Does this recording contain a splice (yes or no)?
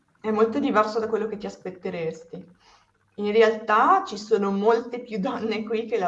no